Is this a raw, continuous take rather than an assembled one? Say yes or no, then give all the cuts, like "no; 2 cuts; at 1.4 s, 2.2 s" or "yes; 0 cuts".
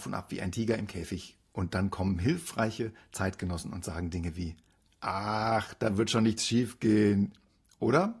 yes; 0 cuts